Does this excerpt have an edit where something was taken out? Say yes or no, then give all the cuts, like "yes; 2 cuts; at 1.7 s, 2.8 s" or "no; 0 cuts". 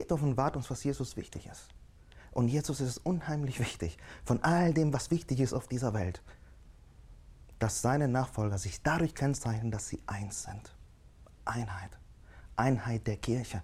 no; 0 cuts